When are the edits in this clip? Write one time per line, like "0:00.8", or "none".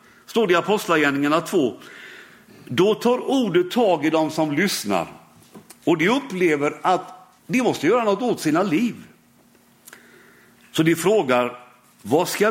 0:07.4